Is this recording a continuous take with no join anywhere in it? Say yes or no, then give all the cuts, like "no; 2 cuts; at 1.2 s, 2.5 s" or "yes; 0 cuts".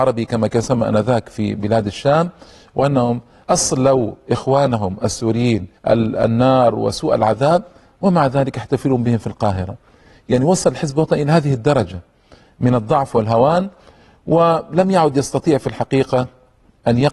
no; 1 cut; at 5.8 s